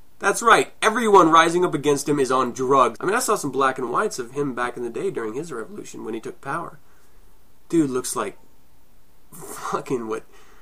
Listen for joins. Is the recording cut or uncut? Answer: cut